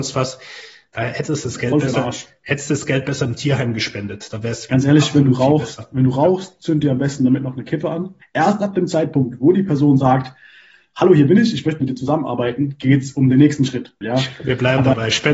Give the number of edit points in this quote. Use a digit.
2